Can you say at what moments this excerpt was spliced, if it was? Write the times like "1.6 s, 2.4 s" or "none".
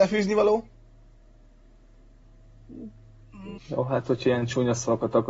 3.5 s